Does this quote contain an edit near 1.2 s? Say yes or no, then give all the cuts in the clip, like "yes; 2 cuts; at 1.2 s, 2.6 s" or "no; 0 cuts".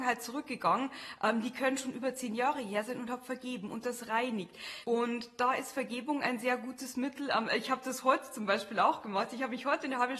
no; 1 cut; at 4.8 s